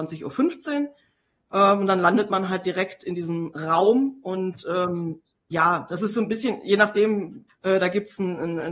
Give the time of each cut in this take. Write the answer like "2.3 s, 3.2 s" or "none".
7.5 s